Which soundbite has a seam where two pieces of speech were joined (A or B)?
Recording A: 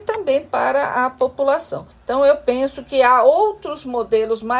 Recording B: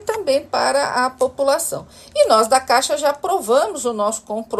A